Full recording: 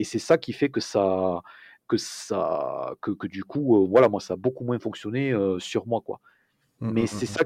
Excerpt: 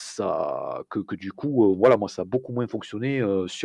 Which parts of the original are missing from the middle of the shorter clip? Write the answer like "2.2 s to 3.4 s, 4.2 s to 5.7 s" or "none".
none